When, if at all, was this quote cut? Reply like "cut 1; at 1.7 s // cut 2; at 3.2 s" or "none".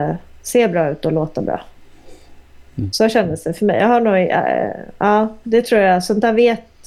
none